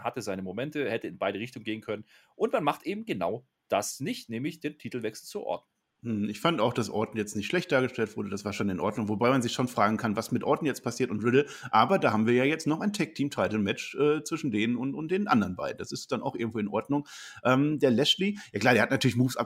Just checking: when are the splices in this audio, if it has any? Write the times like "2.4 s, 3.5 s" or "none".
none